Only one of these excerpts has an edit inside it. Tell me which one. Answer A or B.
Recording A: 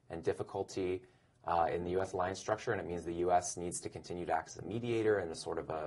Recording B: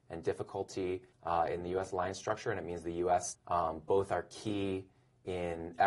B